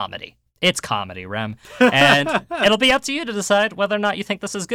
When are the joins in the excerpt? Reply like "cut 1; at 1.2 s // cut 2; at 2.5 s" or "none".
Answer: none